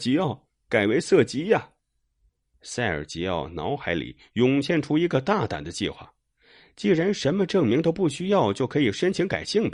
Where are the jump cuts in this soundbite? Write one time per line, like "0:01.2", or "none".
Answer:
0:02.5